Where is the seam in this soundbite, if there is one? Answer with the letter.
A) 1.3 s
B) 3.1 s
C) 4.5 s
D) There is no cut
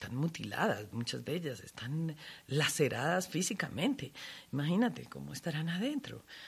D